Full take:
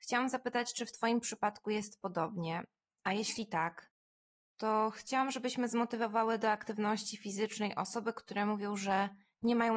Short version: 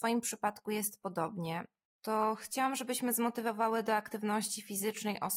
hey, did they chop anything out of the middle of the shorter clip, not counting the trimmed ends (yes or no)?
yes